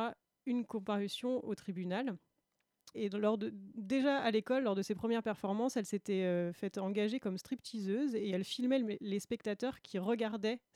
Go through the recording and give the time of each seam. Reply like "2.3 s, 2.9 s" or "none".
2.9 s